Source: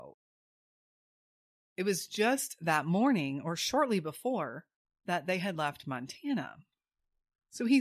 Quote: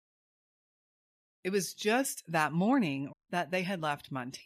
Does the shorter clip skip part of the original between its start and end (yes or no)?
yes